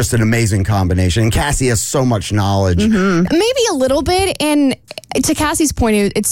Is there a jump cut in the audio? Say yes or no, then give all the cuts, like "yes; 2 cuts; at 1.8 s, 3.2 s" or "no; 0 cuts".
yes; 1 cut; at 3.3 s